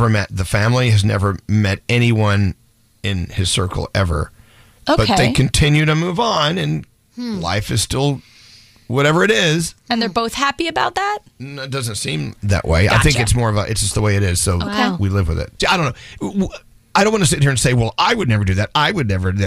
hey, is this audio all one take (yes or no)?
no